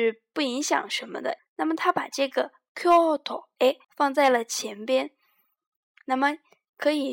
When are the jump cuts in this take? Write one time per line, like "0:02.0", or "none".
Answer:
0:01.4
0:03.8